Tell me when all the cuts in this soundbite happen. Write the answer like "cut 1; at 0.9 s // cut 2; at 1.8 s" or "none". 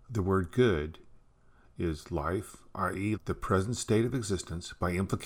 cut 1; at 3.2 s